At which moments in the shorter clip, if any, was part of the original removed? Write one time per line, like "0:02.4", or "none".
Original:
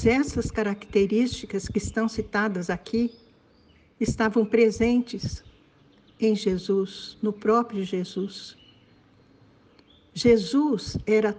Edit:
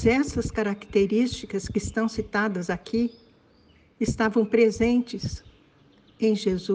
none

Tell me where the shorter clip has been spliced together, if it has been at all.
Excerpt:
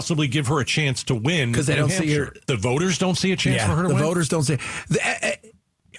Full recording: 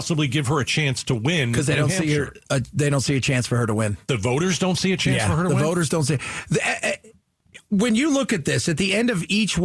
0:02.4

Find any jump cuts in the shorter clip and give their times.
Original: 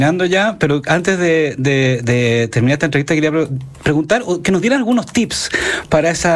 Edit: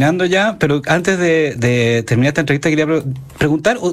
0:01.6

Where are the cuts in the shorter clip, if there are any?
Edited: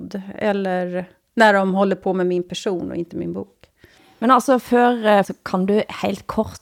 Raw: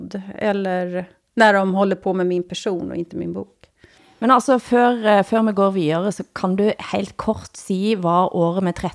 0:05.2

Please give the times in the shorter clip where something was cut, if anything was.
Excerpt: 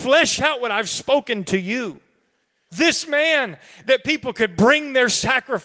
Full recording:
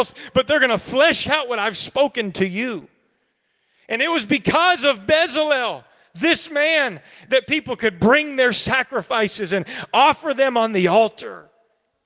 0:02.7

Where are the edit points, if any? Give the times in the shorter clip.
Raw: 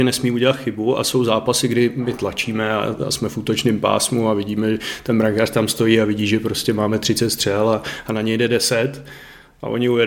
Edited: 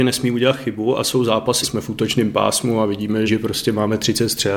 0:01.6
0:03.3

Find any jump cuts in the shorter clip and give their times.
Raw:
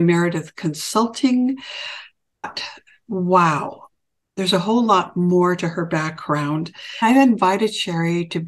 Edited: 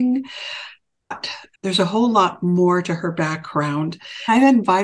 0:01.5

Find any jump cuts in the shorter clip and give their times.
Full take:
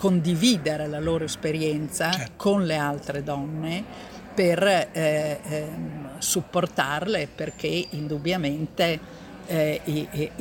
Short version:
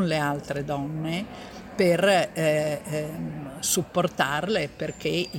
none

